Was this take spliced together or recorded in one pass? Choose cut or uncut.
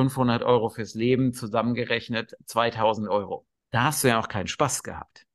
cut